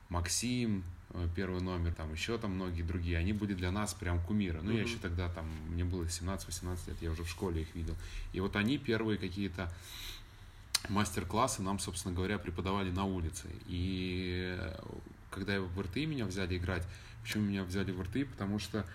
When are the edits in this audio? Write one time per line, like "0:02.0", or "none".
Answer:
0:01.9